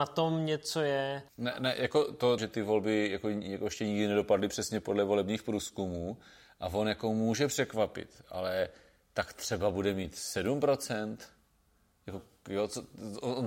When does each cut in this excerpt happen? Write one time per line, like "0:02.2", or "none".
0:01.3
0:02.4

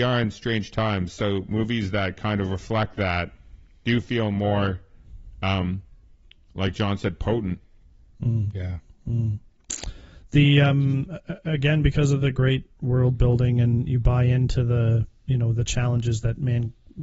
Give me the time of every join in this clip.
none

